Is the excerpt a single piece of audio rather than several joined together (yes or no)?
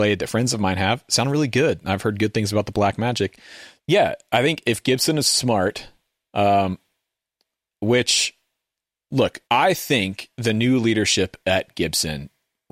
no